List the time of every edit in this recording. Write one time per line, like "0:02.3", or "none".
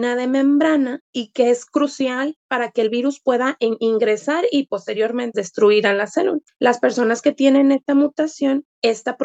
0:05.3